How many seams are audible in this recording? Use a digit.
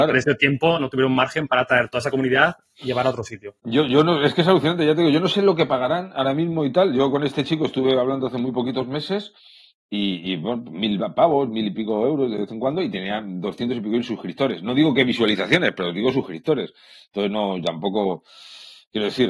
0